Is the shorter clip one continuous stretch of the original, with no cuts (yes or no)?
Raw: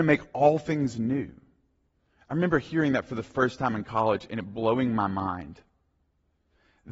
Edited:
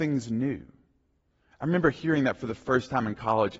yes